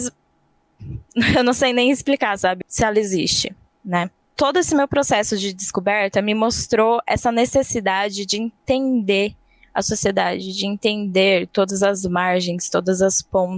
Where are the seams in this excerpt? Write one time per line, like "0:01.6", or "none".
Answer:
0:02.6